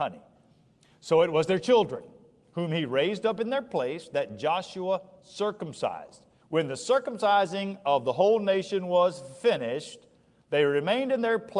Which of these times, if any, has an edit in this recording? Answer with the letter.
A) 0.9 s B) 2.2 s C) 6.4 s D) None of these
C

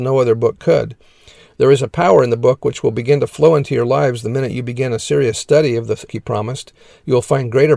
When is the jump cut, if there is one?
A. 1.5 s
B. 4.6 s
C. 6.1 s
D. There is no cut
C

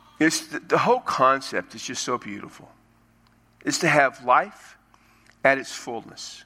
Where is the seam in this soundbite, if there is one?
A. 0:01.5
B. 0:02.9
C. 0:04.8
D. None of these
D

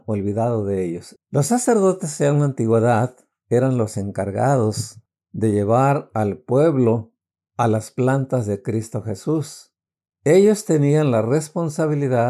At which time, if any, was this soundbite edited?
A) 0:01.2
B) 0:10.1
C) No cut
A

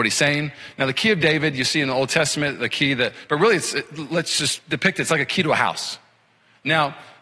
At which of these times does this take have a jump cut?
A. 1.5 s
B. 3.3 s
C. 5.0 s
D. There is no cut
B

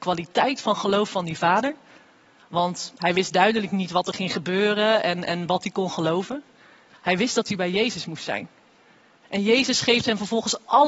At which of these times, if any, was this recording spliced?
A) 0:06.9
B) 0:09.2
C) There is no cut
A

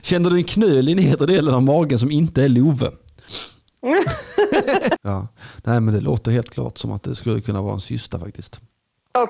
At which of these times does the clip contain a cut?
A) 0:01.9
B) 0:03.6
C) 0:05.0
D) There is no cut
C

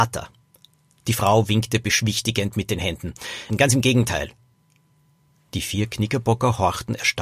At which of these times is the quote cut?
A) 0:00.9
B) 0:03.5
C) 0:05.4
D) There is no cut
B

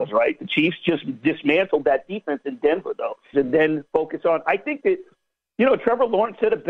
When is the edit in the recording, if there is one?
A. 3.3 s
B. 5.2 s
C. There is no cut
A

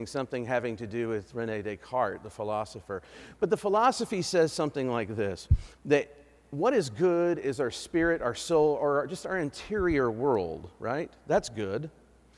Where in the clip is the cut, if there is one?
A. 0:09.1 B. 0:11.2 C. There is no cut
C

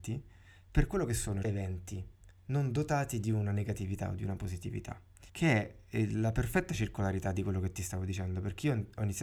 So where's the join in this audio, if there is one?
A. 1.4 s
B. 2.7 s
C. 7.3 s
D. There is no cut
A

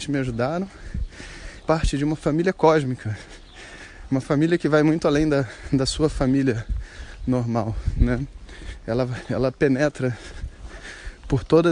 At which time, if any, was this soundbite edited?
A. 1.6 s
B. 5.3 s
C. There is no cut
A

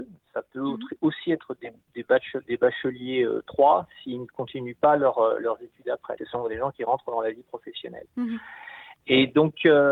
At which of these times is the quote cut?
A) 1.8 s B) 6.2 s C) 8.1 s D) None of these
B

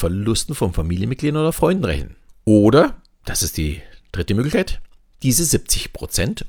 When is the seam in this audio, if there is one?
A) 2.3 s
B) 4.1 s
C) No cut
A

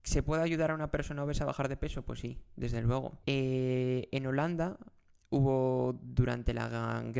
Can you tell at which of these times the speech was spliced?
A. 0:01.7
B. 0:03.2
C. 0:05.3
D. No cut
B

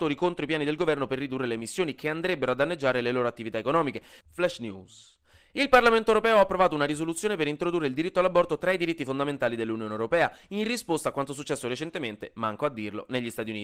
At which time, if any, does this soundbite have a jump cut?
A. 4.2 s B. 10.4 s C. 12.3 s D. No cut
A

